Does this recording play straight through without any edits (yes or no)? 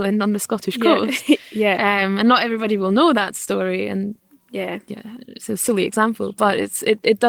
yes